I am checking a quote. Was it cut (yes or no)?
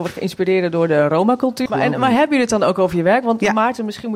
yes